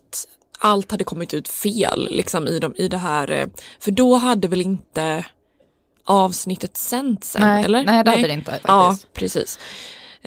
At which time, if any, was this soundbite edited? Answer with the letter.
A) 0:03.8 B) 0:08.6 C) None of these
B